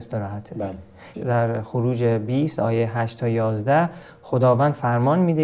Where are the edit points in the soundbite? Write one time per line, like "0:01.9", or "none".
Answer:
0:01.1